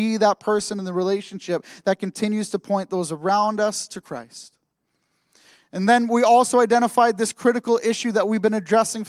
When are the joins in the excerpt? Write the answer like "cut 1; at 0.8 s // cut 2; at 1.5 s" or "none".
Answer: none

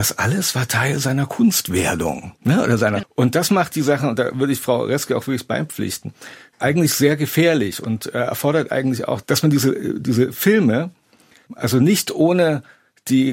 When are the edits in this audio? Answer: cut 1; at 3.0 s

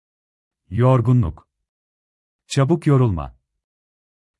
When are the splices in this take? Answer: none

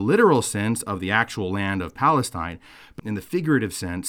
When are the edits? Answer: cut 1; at 3.0 s

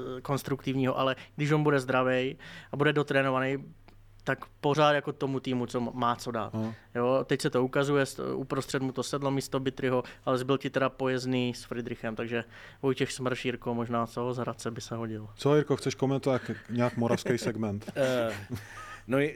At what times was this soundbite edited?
none

